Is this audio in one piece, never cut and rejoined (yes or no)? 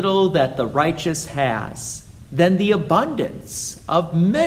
yes